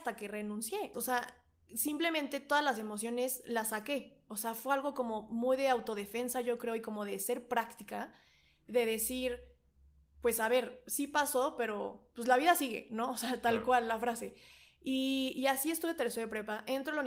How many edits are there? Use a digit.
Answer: 1